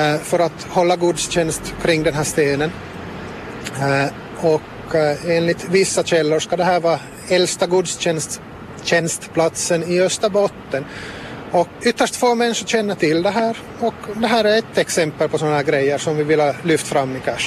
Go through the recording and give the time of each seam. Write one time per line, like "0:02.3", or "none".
0:11.8

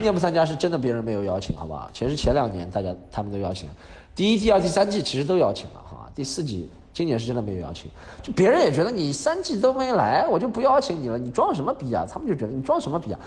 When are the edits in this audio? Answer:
none

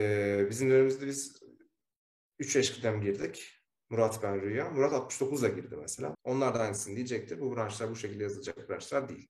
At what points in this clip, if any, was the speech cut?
0:06.1

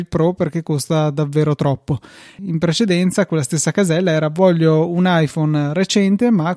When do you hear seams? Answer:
0:02.4

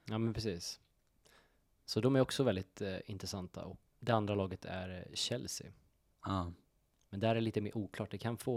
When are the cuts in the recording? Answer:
0:03.9

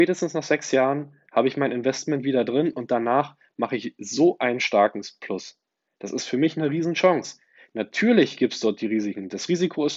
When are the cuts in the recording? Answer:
none

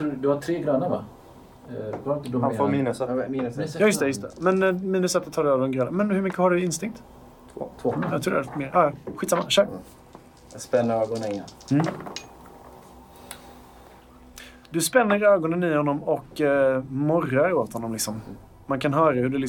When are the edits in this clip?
none

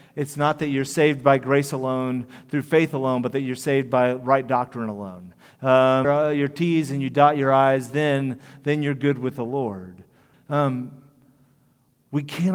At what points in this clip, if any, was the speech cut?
0:06.0
0:10.3

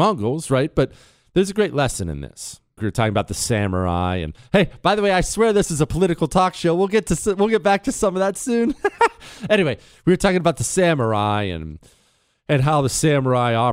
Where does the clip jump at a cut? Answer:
0:02.8

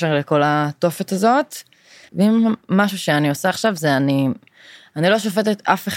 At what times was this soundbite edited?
0:02.1

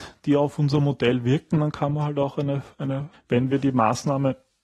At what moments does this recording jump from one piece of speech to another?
0:03.1

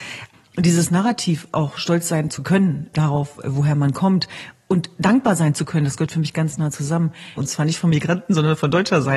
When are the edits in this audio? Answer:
0:07.4

